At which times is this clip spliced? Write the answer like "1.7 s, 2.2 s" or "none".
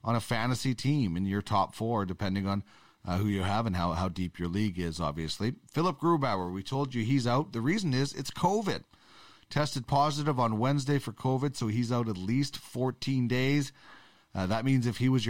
none